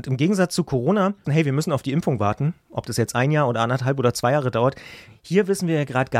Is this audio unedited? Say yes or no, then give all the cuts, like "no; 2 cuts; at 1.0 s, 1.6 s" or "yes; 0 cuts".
no; 1 cut; at 1.2 s